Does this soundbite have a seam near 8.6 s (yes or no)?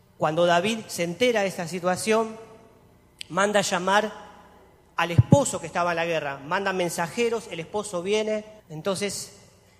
yes